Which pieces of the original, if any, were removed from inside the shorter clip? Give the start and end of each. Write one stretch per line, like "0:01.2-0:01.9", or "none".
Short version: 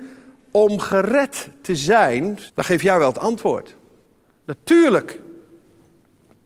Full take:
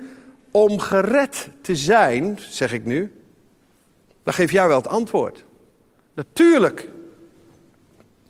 0:02.5-0:04.2